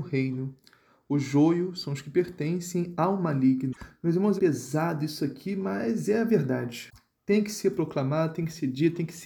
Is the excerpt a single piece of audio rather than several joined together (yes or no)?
no